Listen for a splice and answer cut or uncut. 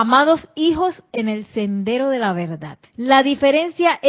cut